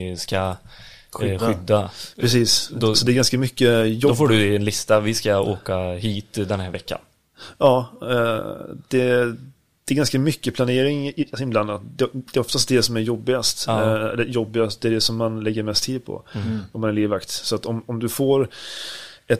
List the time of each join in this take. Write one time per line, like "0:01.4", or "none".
none